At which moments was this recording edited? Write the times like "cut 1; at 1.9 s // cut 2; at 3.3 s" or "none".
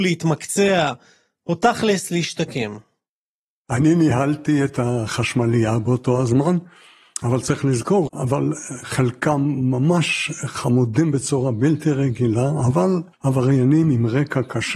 cut 1; at 8.1 s // cut 2; at 13.1 s